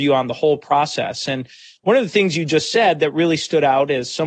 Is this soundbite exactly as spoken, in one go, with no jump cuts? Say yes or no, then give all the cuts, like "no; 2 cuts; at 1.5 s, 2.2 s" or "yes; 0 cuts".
yes; 0 cuts